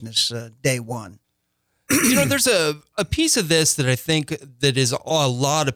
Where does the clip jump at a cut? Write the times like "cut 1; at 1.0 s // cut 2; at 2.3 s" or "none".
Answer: cut 1; at 1.2 s